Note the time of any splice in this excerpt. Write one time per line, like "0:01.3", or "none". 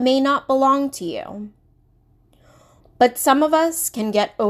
0:02.8